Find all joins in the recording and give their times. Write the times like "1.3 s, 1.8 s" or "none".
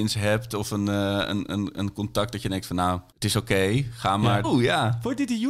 3.1 s, 4.4 s